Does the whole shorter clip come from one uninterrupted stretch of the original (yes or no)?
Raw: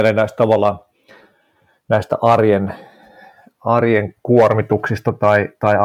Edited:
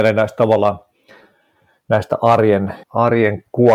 no